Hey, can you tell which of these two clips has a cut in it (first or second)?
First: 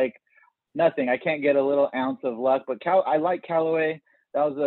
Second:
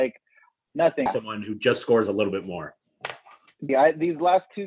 second